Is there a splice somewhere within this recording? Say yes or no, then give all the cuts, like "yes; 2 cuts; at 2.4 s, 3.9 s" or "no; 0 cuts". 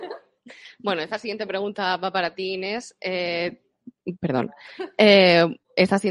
no; 0 cuts